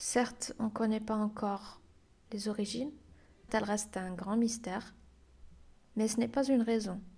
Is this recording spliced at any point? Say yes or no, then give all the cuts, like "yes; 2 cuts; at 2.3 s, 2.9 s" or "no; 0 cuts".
yes; 1 cut; at 3.5 s